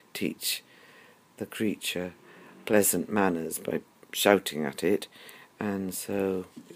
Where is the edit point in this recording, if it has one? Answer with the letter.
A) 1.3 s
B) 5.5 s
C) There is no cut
C